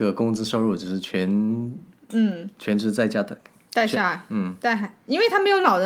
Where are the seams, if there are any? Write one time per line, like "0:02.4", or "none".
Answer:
none